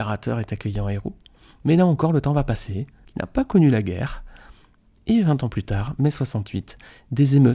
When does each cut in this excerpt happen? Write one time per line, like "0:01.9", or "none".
0:03.0